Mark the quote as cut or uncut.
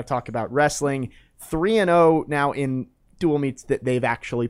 uncut